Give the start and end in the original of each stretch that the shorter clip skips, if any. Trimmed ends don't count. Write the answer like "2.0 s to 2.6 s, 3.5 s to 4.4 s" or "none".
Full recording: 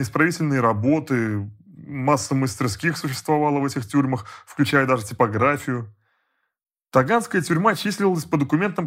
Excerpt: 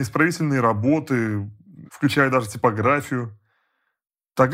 1.9 s to 4.4 s